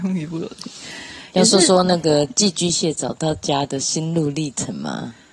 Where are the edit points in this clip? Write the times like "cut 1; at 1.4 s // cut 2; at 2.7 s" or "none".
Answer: none

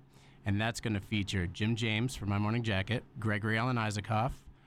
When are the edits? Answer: cut 1; at 3.1 s

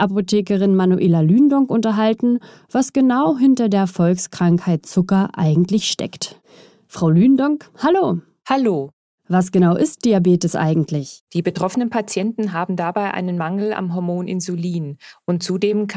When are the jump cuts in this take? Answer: cut 1; at 11.3 s

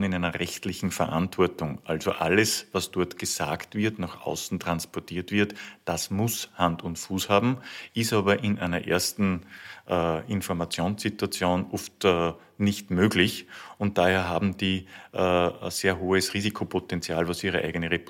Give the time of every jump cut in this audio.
none

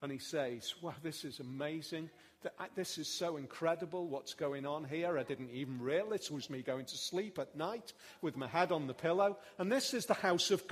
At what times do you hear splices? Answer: cut 1; at 6.5 s

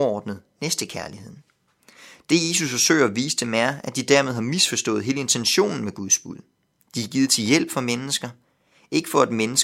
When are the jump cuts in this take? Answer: none

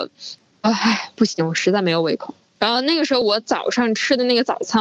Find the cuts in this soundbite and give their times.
none

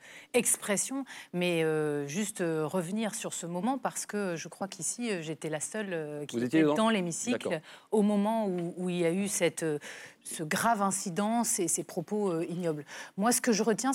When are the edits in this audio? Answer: cut 1; at 10.2 s

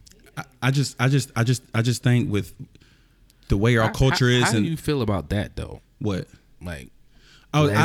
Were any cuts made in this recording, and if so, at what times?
none

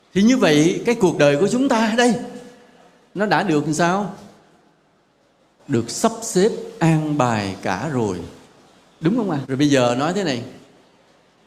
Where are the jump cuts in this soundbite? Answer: cut 1; at 9.4 s

